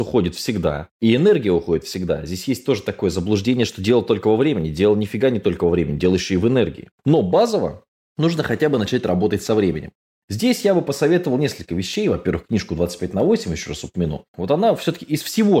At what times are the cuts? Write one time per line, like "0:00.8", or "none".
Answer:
0:06.9
0:14.3